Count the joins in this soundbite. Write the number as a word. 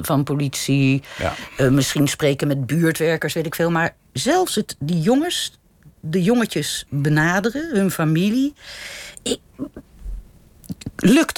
zero